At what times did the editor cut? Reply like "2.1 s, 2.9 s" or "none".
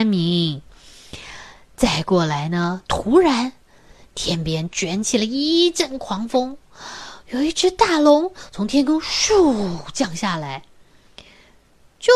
none